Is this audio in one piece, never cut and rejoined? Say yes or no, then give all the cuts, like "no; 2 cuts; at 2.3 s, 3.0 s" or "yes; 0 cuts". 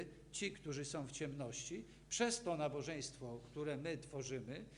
yes; 0 cuts